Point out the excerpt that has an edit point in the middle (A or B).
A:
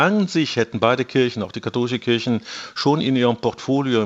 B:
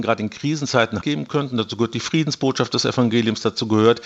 B